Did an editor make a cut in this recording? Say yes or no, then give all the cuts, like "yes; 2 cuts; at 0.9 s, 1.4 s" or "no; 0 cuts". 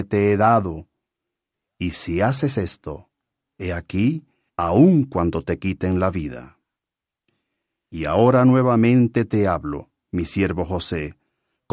yes; 1 cut; at 4.5 s